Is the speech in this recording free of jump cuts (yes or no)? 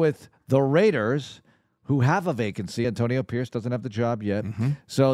yes